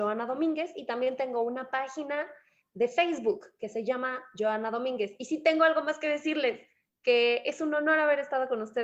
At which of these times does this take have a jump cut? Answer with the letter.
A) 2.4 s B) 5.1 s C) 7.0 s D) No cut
D